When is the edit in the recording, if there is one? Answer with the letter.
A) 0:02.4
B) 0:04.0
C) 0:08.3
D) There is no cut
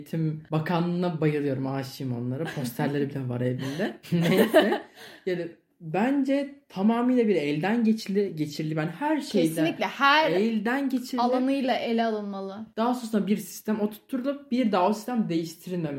B